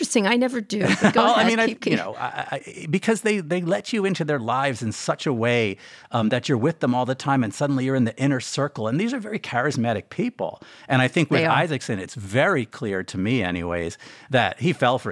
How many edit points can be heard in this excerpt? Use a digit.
0